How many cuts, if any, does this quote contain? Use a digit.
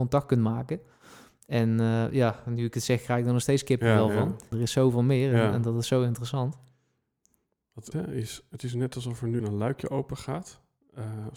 3